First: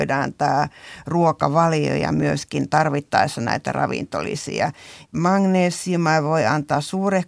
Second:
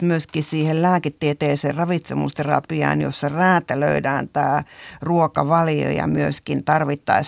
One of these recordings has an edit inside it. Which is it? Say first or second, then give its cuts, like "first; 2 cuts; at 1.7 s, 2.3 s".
first; 1 cut; at 5.1 s